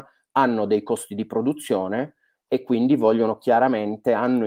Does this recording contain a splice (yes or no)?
no